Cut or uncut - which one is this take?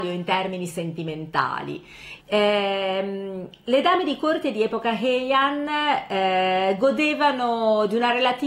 cut